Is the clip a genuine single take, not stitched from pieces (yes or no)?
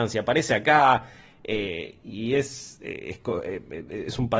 yes